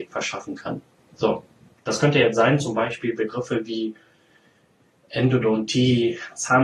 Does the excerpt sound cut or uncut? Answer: cut